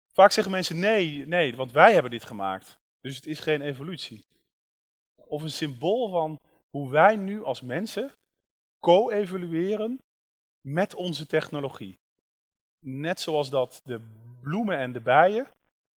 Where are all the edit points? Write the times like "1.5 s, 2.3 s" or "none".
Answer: 5.1 s